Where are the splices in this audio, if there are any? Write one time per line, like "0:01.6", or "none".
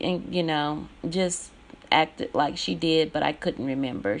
0:01.0